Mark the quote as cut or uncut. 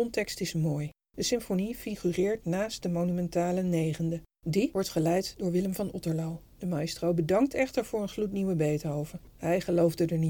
uncut